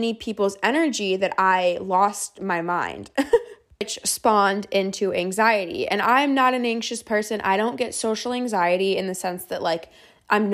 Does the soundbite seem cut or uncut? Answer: uncut